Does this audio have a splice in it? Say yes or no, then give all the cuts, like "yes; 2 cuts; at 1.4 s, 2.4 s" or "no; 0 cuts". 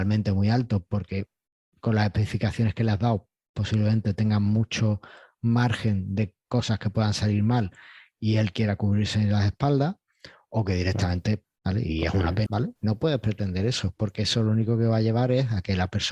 yes; 2 cuts; at 11.5 s, 12.5 s